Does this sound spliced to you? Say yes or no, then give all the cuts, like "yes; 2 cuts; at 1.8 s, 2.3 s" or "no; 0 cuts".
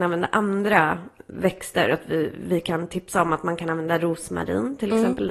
no; 0 cuts